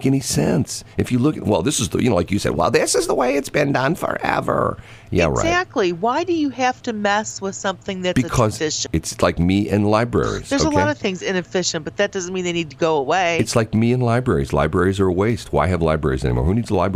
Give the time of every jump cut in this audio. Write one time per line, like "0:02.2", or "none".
0:08.9